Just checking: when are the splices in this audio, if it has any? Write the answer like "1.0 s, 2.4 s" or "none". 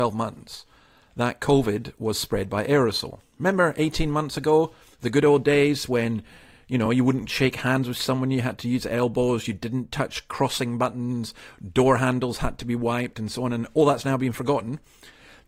none